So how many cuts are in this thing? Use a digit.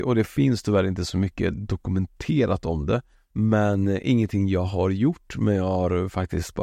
1